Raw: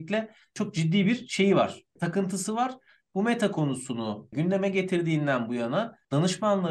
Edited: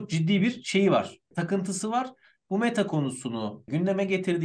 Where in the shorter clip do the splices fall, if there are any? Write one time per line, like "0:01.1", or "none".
none